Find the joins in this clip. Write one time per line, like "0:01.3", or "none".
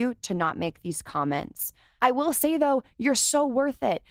0:02.0